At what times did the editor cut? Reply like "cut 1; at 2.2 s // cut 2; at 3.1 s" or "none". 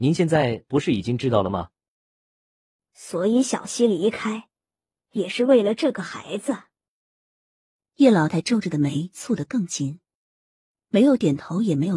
cut 1; at 8.3 s